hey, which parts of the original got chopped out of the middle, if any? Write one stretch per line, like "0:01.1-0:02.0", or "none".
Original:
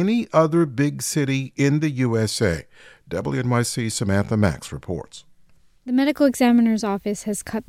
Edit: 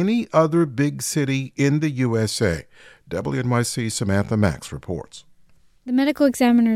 none